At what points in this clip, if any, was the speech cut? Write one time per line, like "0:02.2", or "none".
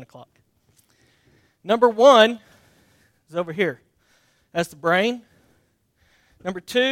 none